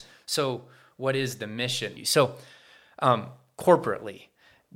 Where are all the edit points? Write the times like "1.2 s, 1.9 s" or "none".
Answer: 2.0 s